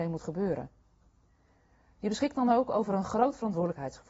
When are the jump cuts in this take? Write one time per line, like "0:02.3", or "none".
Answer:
none